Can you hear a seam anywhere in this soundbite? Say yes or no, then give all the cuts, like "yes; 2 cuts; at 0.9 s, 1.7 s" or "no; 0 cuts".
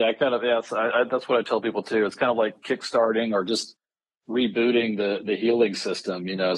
no; 0 cuts